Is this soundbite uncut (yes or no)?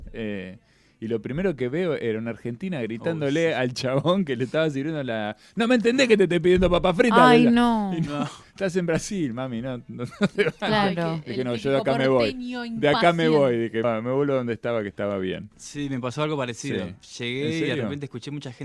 no